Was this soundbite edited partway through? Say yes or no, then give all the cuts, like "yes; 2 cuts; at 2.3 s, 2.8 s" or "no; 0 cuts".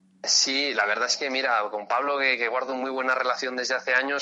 no; 0 cuts